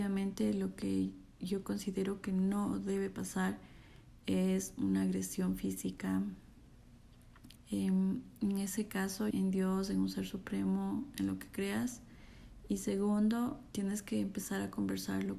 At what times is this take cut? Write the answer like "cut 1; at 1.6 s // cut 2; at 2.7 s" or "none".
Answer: cut 1; at 7.6 s // cut 2; at 9.3 s // cut 3; at 13.7 s